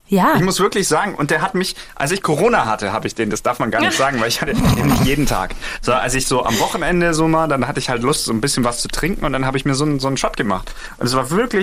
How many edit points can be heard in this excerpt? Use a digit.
0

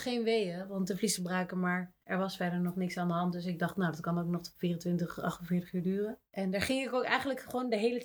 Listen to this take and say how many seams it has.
1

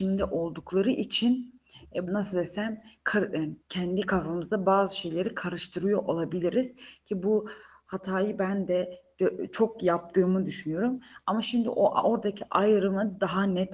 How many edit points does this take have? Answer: 2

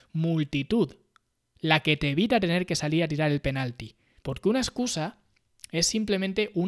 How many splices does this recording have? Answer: 1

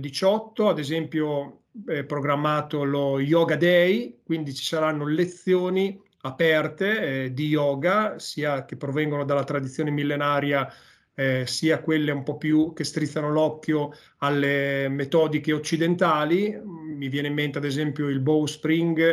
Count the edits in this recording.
0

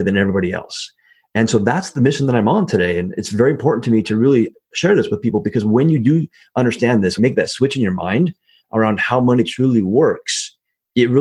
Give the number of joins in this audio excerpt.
1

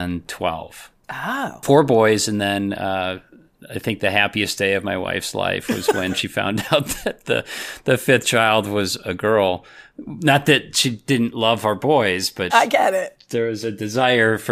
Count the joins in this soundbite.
1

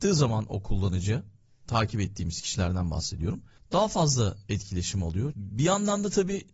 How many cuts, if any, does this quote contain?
1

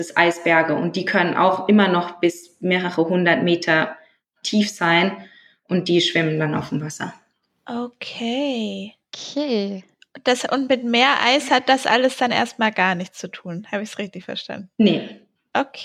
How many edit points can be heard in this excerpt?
0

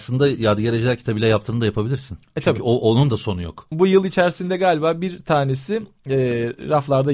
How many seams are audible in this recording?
1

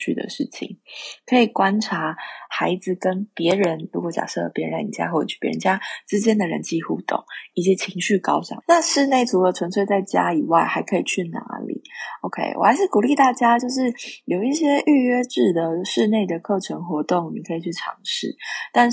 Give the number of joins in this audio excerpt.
1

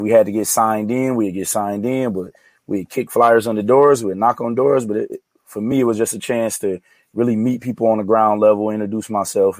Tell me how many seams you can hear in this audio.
0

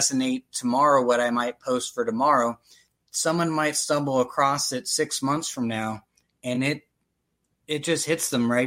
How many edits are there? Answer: 0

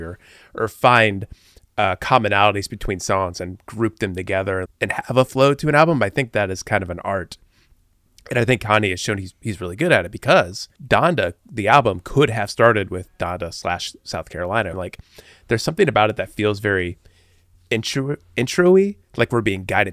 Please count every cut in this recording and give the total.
3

